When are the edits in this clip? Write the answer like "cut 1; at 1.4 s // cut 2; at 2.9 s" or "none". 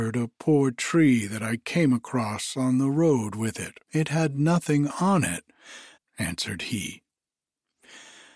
cut 1; at 3.8 s // cut 2; at 6.0 s